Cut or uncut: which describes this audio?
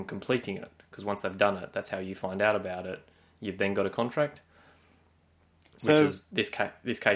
uncut